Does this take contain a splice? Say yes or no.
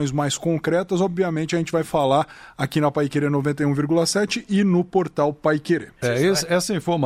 yes